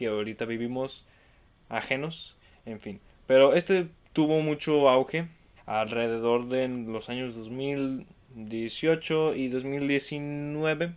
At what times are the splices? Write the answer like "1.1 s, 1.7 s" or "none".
5.6 s